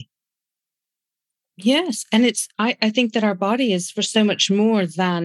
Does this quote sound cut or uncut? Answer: uncut